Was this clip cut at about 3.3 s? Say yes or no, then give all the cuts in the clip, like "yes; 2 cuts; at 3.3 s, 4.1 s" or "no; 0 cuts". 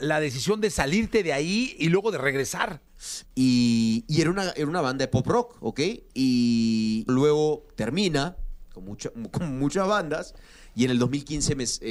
yes; 2 cuts; at 3.3 s, 7.1 s